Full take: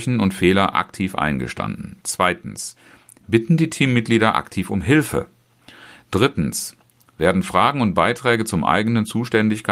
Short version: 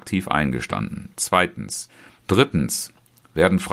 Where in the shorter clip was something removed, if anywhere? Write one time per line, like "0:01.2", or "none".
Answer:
0:02.2